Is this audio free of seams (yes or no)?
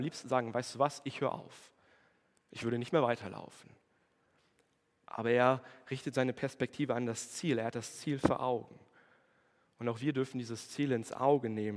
yes